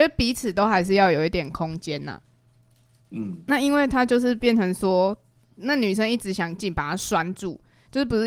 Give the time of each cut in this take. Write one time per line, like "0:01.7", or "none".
0:06.6